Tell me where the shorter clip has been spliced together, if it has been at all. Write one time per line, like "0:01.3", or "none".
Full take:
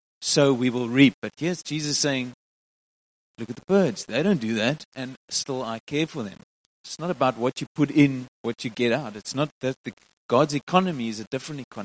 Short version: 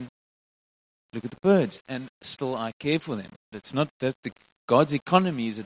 0:01.8
0:03.5